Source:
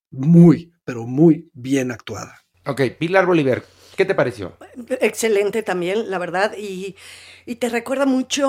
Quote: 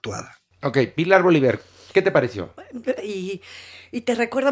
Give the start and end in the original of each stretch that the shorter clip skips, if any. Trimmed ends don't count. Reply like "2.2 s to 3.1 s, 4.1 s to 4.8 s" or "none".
5.0 s to 6.5 s